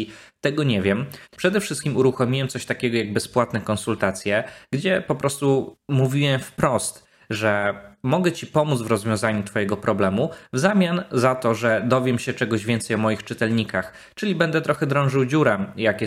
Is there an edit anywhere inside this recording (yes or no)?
yes